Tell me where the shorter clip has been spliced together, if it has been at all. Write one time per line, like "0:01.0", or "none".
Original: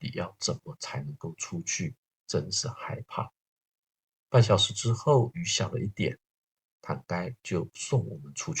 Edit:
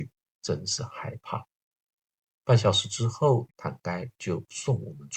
0:03.5